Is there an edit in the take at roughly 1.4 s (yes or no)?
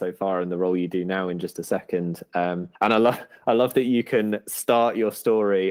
no